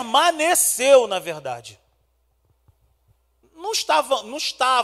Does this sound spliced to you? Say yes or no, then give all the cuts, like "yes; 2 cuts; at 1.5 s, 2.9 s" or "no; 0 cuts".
yes; 1 cut; at 3.4 s